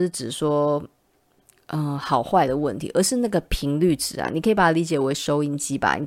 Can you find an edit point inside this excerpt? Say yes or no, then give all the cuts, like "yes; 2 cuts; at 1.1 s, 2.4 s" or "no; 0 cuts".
no; 0 cuts